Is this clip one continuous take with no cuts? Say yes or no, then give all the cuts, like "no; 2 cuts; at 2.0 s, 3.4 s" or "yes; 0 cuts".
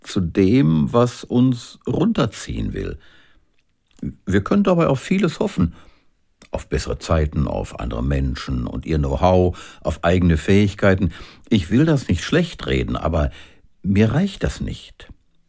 yes; 0 cuts